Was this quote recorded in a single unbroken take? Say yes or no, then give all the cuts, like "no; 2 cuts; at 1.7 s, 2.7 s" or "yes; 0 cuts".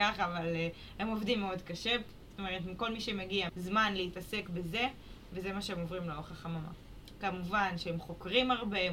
no; 2 cuts; at 3.5 s, 7.2 s